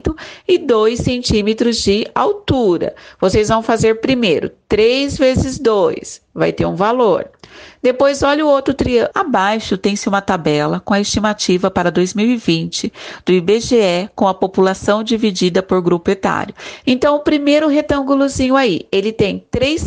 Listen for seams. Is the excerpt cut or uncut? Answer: cut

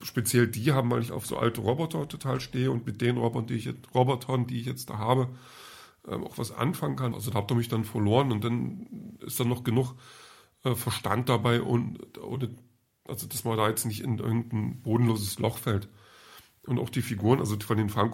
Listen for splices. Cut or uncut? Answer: cut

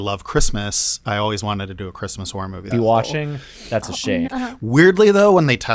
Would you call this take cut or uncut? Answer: cut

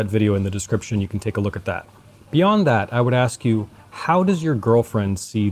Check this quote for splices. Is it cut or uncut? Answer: uncut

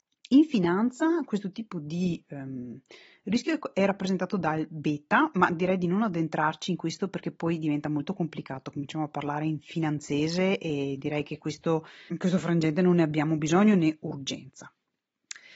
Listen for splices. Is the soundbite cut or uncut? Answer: cut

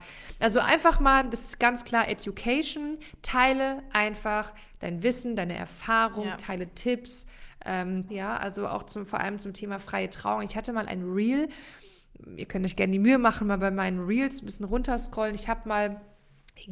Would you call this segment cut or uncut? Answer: cut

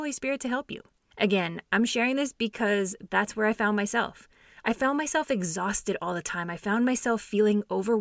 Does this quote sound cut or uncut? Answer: uncut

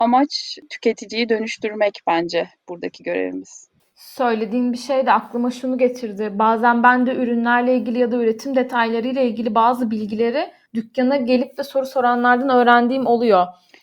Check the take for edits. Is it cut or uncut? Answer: uncut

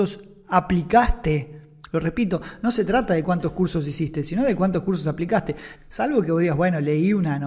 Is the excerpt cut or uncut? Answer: cut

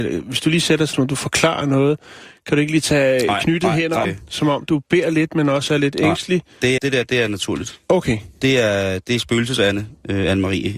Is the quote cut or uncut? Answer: cut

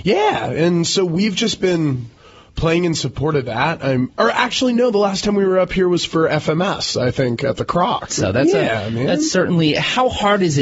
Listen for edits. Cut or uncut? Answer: cut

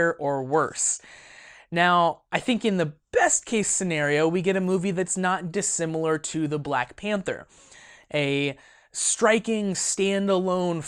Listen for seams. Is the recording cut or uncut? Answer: uncut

